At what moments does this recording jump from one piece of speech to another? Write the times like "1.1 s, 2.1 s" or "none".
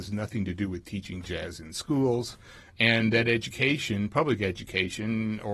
none

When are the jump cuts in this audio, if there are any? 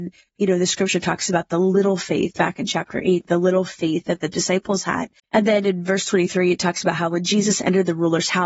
5.2 s

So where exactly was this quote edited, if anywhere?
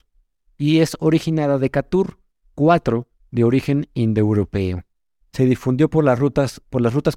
5.2 s

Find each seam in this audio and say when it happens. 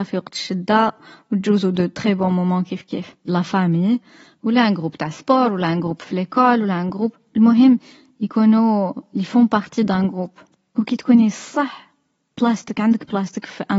3.3 s

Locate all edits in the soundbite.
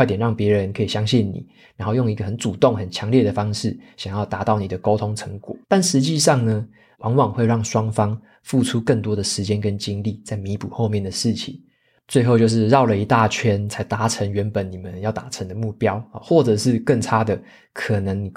5.6 s, 6.9 s

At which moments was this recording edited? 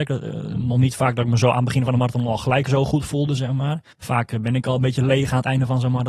3.9 s

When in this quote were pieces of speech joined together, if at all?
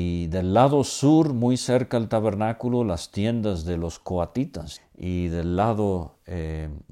4.8 s

